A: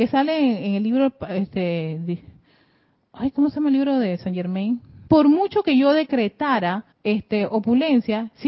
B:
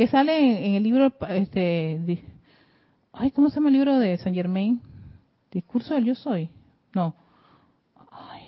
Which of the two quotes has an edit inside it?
A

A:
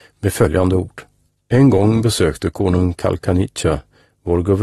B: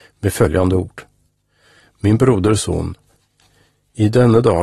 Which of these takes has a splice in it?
A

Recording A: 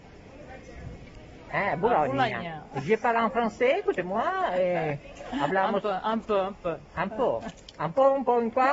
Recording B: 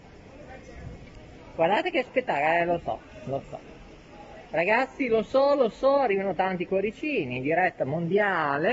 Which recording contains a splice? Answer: A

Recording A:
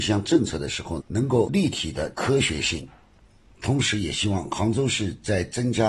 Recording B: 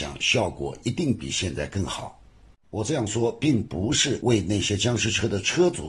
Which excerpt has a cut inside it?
A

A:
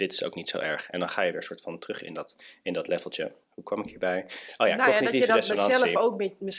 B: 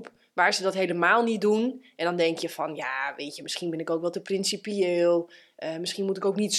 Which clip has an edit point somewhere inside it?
A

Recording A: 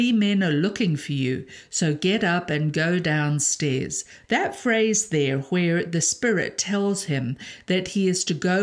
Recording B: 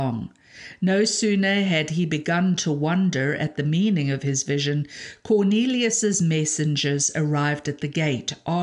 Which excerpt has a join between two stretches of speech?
A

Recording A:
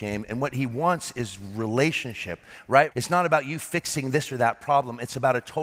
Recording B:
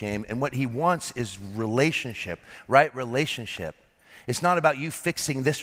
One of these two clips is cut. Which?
A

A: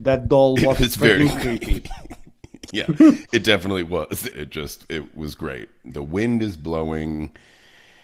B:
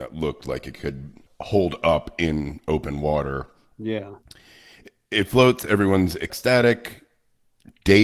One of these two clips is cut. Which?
A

